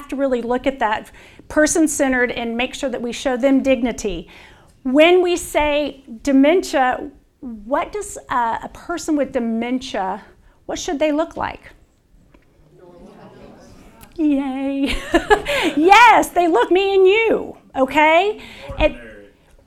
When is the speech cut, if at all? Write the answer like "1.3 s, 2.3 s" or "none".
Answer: 16.7 s